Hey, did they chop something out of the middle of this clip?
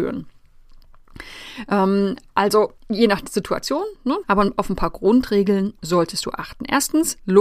yes; 2 cuts; at 2.8 s, 4.2 s

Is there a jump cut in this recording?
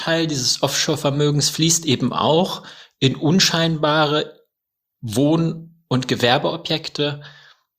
no; 0 cuts

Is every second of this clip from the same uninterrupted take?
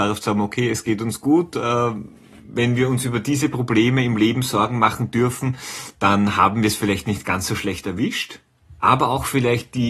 no; 1 cut; at 8.8 s

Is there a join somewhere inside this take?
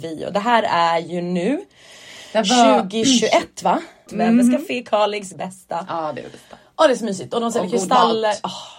yes; 2 cuts; at 4.1 s, 5.3 s

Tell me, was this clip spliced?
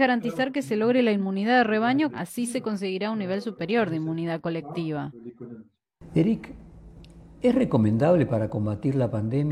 yes; 1 cut; at 2.1 s

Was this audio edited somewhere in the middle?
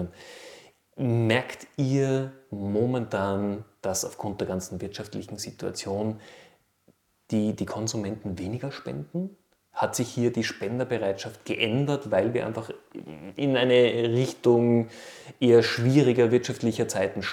no; 0 cuts

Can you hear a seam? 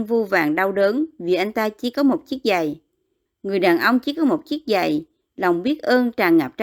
yes; 2 cuts; at 3.3 s, 5.3 s

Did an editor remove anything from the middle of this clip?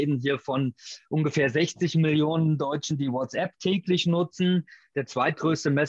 no; 0 cuts

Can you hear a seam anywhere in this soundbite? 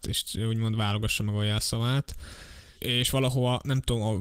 yes; 1 cut; at 2.7 s

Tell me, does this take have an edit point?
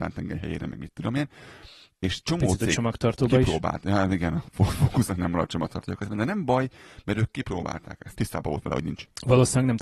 yes; 2 cuts; at 1.9 s, 8.1 s

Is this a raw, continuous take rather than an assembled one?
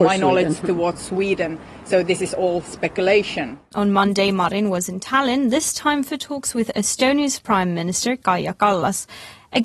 no; 1 cut; at 3.7 s

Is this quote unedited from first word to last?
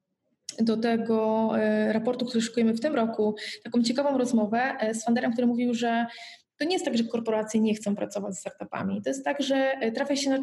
yes; 0 cuts

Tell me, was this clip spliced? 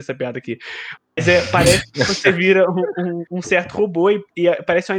no; 0 cuts

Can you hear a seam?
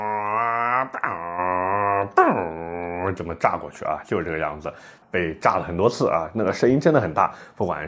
yes; 1 cut; at 5.0 s

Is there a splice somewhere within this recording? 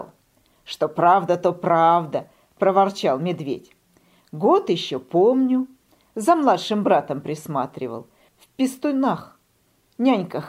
no; 0 cuts

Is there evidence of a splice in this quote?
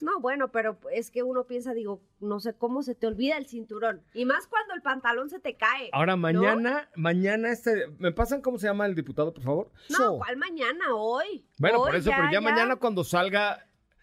yes; 1 cut; at 9.9 s

